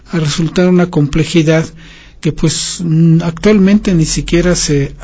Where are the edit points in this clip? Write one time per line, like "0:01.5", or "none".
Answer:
none